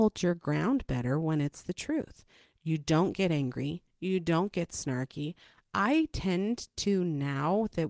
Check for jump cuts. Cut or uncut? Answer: uncut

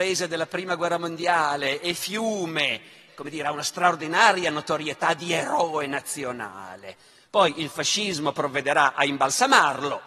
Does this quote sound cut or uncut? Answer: cut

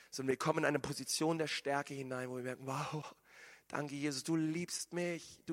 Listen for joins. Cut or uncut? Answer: uncut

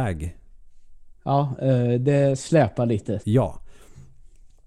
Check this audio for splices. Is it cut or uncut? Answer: cut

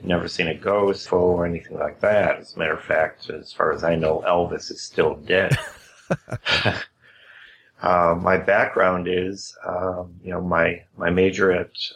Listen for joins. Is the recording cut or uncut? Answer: cut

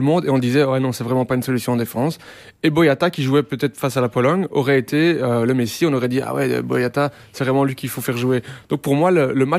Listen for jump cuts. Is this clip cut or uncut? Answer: uncut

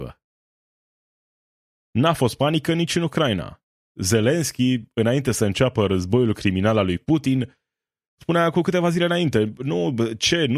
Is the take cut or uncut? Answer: uncut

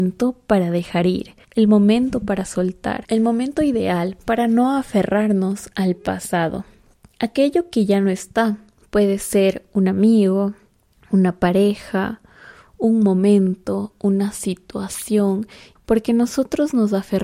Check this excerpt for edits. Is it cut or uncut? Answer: cut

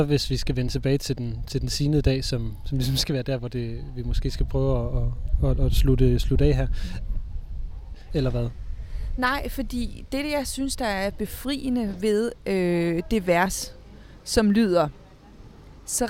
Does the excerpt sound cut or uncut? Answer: cut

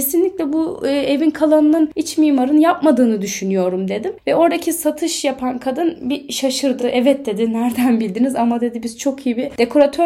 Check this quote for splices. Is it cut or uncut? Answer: uncut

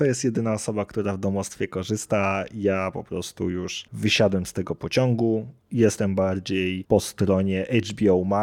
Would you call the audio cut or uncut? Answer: cut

